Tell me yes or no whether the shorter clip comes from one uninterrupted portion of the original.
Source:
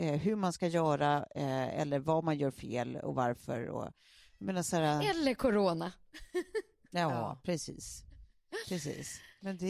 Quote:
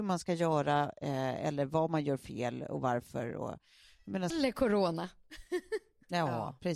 no